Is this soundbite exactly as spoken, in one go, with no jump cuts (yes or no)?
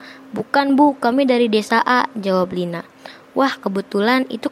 yes